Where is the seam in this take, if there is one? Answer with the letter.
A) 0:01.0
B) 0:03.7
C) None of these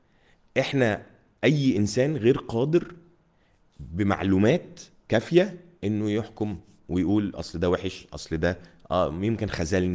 C